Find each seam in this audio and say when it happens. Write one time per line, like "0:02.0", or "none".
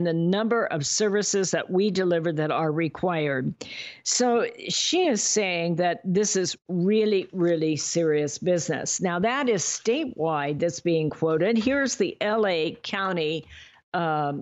none